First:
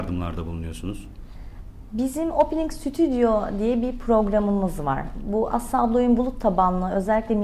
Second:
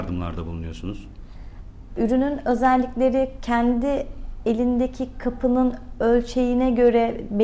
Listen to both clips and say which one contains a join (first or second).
second